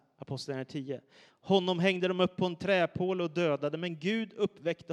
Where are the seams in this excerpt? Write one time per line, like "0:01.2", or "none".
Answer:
0:01.3